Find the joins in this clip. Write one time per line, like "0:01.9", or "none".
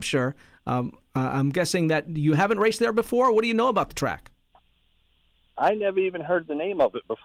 none